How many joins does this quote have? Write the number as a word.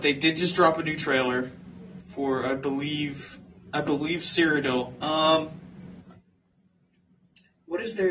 one